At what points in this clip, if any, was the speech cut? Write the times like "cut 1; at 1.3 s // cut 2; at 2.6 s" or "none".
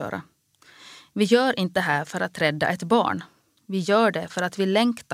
none